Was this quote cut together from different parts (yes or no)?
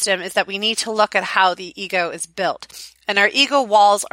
no